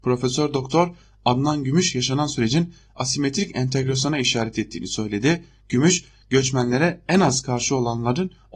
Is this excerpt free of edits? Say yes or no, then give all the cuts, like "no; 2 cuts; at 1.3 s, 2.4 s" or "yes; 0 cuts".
yes; 0 cuts